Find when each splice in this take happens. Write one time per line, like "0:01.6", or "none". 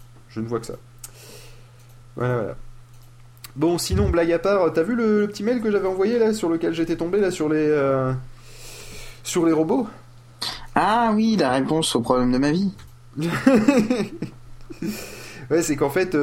none